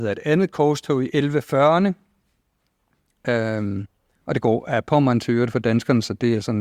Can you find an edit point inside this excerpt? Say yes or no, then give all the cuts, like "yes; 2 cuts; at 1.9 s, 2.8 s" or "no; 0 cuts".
no; 0 cuts